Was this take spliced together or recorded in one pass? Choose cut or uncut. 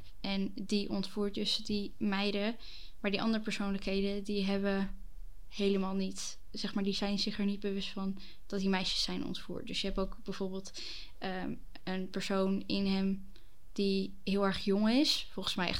uncut